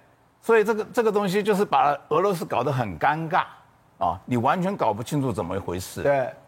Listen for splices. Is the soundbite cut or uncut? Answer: uncut